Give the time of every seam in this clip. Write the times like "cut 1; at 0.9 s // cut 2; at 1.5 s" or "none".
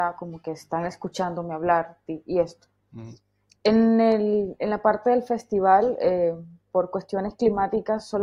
none